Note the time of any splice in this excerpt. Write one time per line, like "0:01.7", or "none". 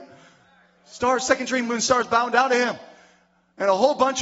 0:01.6